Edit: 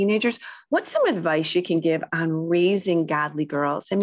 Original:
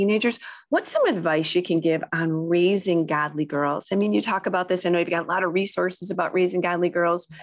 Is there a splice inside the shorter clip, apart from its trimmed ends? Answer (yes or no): no